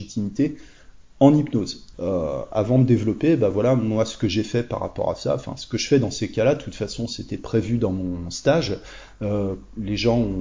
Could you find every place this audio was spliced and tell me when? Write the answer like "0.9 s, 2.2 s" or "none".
1.9 s